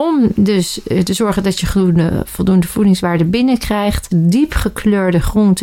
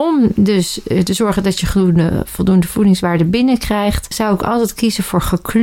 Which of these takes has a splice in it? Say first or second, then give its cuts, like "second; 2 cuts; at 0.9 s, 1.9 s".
first; 1 cut; at 4.1 s